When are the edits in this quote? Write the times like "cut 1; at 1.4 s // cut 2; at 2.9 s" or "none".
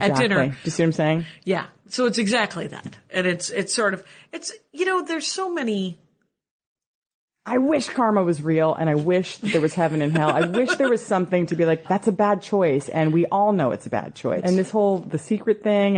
cut 1; at 11.8 s // cut 2; at 14.4 s